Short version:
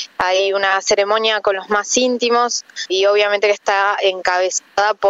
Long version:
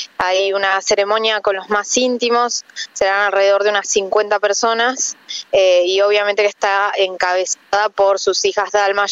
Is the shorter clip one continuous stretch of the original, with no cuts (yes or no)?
no